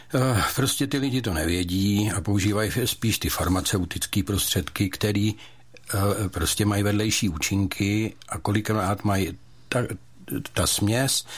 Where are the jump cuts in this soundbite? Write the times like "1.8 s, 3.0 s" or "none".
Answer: none